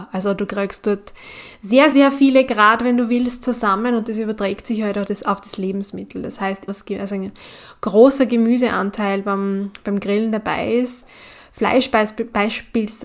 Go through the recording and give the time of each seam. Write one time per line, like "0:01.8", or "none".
0:01.9
0:06.7